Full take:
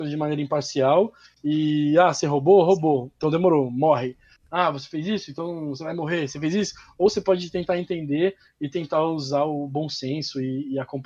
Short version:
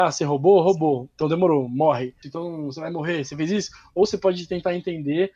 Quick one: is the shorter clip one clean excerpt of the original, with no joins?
no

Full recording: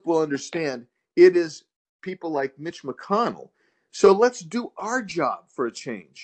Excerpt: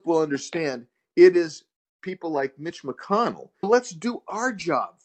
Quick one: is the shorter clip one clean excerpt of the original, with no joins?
no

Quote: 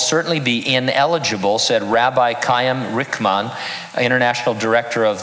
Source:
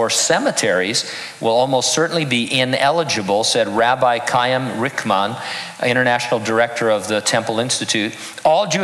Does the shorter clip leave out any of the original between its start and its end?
no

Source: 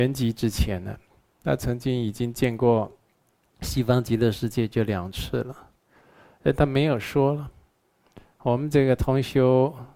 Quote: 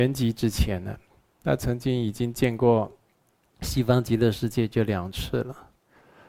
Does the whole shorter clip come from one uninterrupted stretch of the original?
yes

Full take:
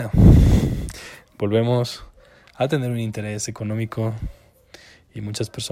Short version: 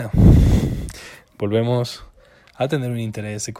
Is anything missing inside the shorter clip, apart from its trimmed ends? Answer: no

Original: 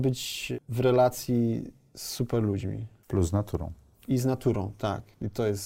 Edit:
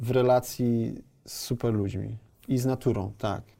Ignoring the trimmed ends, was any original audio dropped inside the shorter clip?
yes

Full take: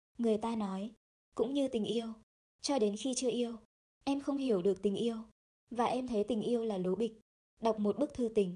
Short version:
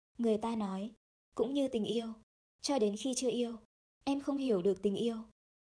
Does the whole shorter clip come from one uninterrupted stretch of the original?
yes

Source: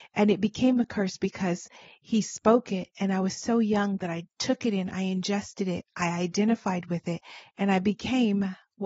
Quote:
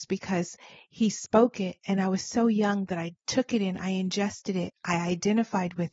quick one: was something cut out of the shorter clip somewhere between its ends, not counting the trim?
no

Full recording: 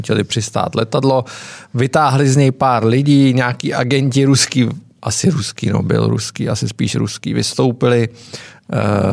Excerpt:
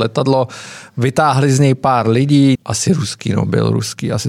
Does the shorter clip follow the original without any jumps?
no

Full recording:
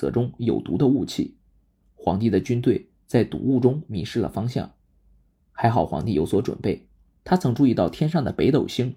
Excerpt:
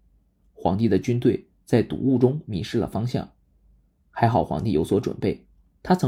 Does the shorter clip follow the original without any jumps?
yes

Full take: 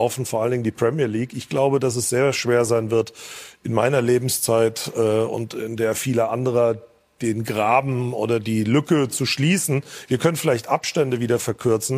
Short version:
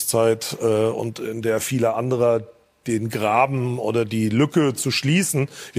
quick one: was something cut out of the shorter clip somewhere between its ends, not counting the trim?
no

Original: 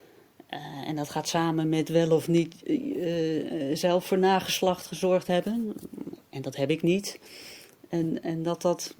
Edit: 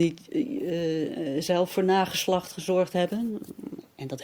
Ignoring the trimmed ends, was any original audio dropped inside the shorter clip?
no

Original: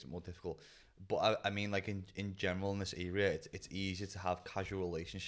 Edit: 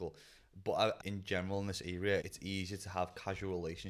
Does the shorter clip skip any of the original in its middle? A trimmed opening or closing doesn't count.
yes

